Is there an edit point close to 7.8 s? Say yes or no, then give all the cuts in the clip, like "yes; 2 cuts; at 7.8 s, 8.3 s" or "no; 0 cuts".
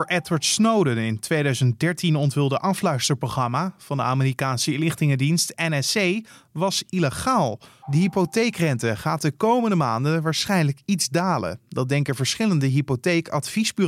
yes; 1 cut; at 7.8 s